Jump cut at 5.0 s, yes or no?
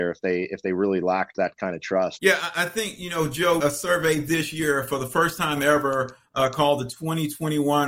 no